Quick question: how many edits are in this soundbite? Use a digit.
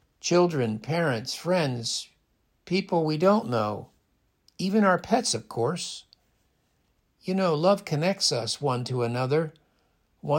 1